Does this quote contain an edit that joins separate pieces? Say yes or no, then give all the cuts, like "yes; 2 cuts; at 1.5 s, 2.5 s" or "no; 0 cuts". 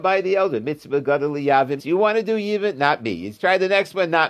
yes; 1 cut; at 1.8 s